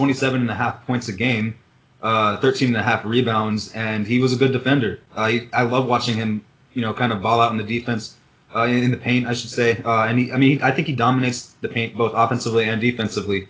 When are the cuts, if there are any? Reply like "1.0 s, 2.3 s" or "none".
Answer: none